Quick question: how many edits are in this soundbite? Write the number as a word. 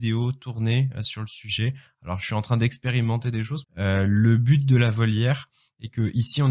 one